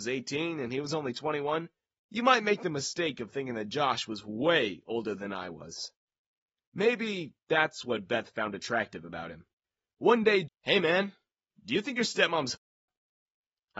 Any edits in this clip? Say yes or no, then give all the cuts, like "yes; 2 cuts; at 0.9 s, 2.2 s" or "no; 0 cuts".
yes; 1 cut; at 10.4 s